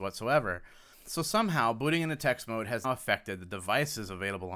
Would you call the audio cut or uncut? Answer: cut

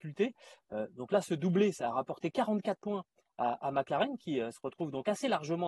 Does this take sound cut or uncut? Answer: uncut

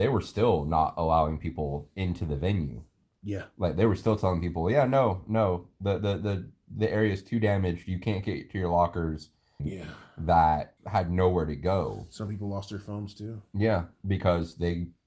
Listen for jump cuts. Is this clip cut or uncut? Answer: cut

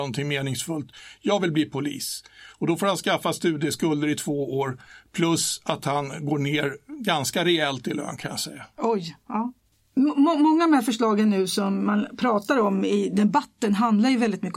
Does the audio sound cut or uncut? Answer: uncut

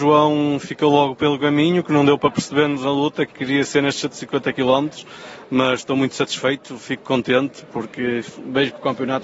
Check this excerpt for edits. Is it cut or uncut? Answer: uncut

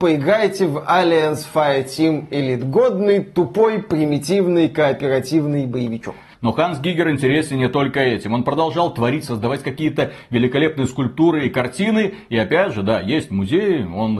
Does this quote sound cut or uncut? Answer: uncut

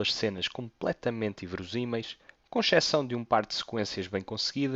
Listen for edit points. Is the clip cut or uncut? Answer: cut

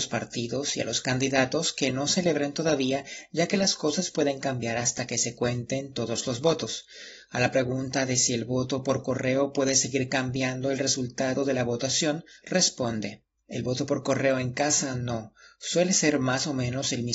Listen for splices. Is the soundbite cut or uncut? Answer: uncut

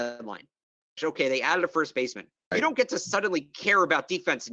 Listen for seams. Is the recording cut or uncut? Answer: cut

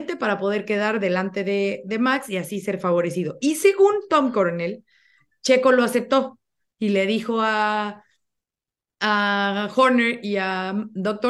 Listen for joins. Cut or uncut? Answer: uncut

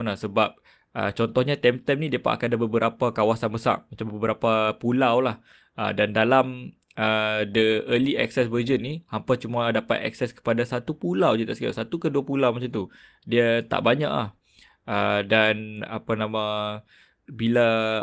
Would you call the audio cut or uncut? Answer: uncut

